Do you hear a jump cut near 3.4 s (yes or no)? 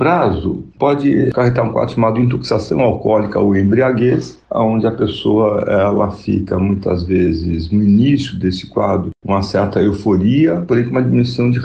no